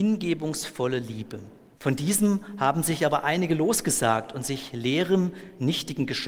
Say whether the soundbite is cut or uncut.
cut